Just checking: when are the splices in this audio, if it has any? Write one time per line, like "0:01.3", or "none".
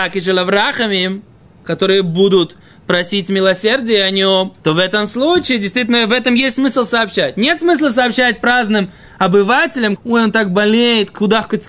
0:04.6
0:10.0